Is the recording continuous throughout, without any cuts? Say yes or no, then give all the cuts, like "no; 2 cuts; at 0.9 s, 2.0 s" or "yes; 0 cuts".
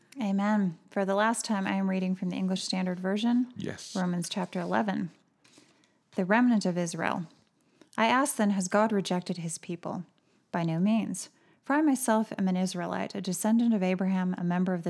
yes; 0 cuts